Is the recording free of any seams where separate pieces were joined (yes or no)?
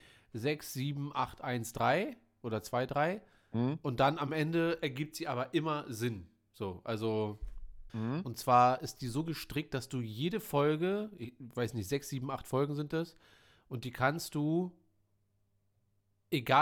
no